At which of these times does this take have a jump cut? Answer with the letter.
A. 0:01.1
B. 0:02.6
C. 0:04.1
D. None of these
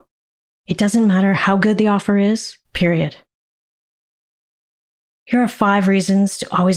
B